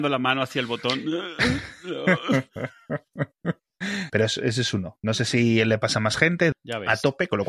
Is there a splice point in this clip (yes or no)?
yes